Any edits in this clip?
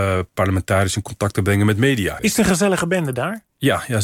yes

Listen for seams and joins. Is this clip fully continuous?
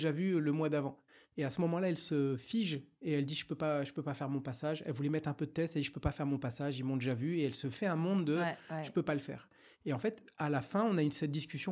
yes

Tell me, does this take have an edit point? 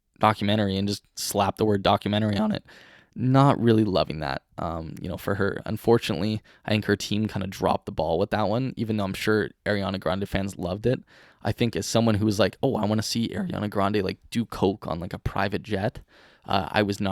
no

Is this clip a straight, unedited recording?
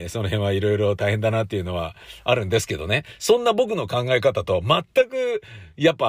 yes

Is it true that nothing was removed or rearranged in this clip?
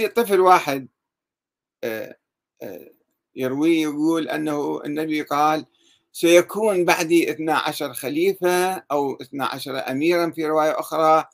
yes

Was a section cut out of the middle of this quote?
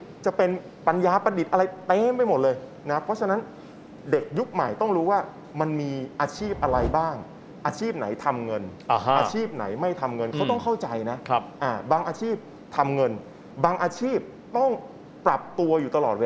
no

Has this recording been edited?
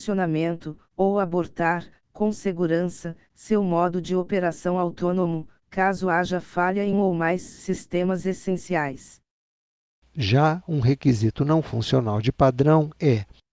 yes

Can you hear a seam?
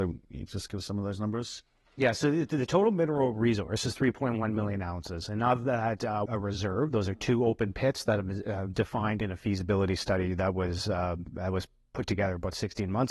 yes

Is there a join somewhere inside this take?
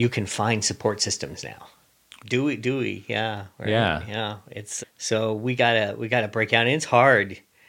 yes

